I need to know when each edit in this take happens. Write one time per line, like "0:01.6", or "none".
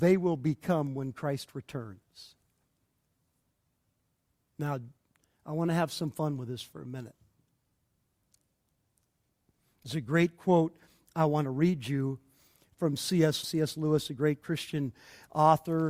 0:13.4